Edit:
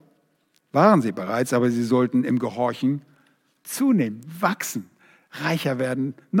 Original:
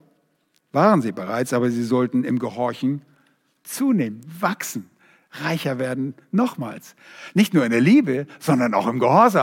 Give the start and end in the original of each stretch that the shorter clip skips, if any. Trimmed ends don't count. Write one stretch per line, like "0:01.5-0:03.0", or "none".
none